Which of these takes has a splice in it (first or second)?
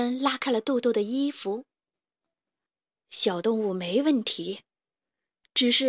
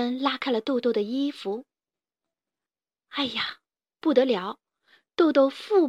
first